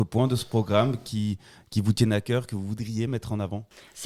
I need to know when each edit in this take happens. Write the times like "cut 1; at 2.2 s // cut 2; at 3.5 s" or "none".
none